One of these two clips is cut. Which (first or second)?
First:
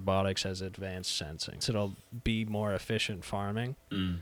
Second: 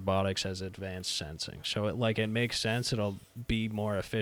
first